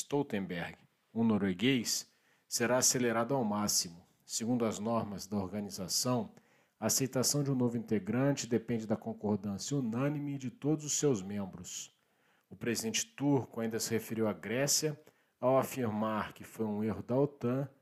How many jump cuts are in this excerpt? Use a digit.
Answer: 2